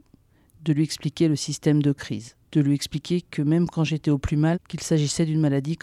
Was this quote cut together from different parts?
yes; 2 cuts; at 2.4 s, 4.5 s

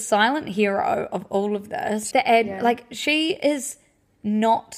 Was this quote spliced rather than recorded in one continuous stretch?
yes; 1 cut; at 2.1 s

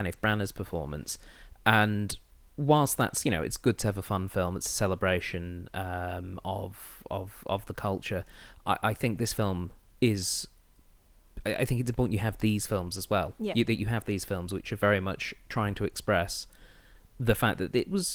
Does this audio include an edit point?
no; 0 cuts

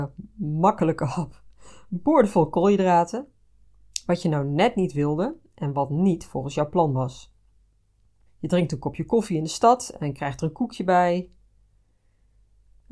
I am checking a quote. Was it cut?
yes; 1 cut; at 8.3 s

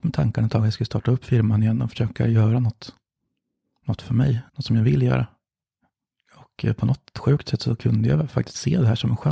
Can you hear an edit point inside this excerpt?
yes; 1 cut; at 4.5 s

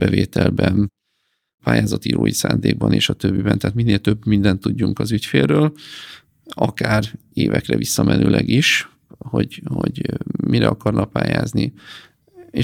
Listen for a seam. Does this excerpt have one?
no; 0 cuts

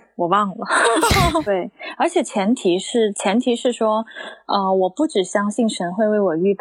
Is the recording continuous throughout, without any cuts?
no; 1 cut; at 1.5 s

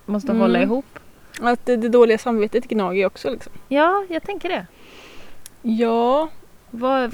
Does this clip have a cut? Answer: no; 0 cuts

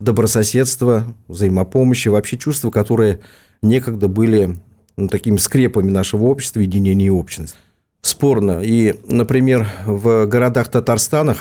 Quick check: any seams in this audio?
no; 0 cuts

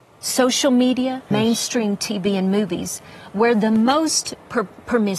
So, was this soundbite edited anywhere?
yes; 1 cut; at 1.3 s

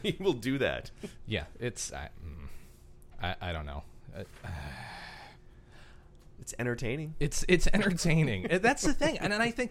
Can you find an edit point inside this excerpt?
no; 0 cuts

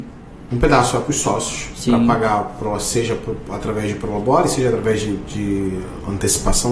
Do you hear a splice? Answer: no; 0 cuts

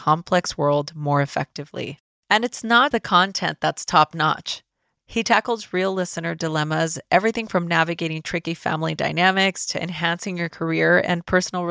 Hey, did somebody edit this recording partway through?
yes; 2 cuts; at 2.9 s, 5.0 s

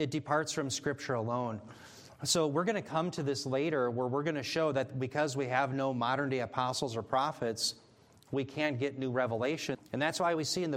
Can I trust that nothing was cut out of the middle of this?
no; 1 cut; at 9.7 s

